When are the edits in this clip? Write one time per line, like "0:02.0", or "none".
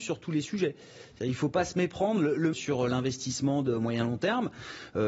0:02.5